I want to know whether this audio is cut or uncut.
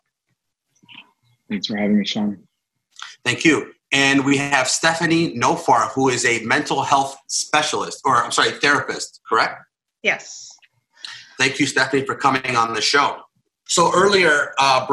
cut